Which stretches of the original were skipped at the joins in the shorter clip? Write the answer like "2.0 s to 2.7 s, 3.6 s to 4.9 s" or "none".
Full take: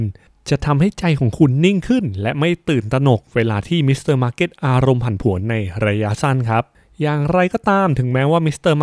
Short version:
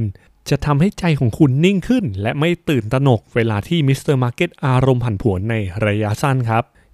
none